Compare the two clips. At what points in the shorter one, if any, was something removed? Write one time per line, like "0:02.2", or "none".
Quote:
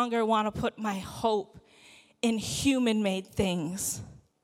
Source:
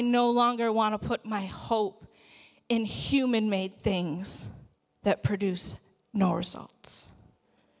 none